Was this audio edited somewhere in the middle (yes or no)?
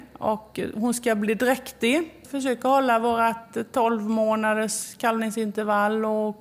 no